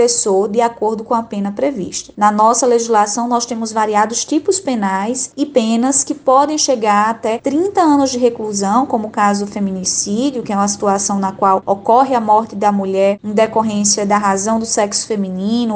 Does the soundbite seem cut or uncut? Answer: uncut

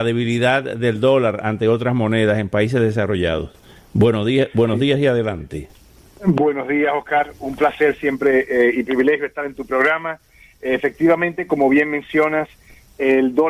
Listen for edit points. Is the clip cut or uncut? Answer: uncut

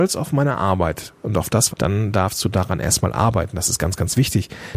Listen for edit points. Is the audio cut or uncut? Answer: cut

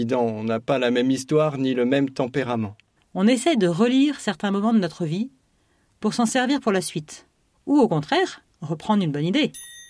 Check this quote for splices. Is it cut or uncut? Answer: cut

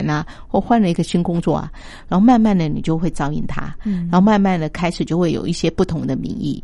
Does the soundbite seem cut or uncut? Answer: uncut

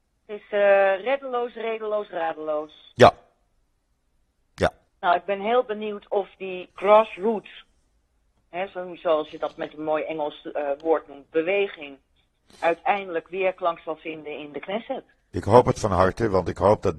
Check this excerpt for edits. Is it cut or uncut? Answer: cut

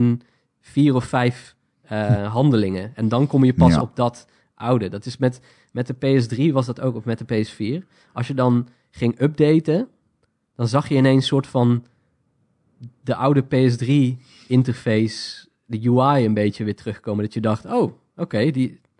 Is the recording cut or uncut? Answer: uncut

